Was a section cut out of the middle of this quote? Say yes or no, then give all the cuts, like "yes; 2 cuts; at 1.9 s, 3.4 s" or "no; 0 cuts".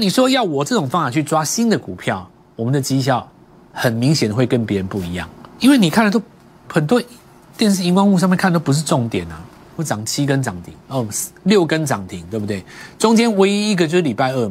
yes; 2 cuts; at 5.6 s, 9.8 s